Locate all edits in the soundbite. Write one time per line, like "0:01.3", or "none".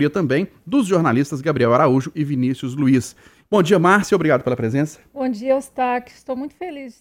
0:03.4